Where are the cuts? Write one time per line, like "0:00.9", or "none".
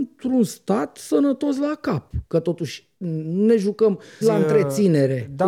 0:04.2